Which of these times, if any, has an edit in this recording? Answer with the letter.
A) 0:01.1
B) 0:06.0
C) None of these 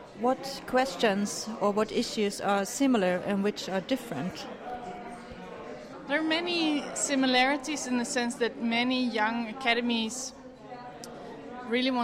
C